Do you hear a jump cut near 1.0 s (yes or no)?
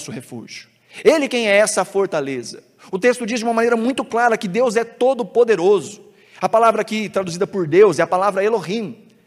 no